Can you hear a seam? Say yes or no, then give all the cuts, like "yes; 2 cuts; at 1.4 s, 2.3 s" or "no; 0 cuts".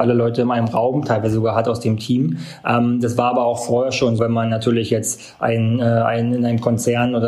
yes; 1 cut; at 4.2 s